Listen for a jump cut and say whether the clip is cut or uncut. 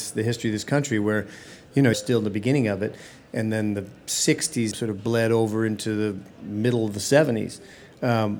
cut